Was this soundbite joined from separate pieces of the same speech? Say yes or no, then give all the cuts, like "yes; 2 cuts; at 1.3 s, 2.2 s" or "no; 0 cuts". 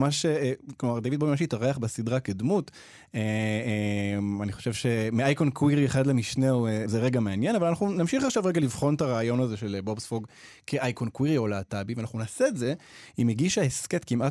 yes; 1 cut; at 6.8 s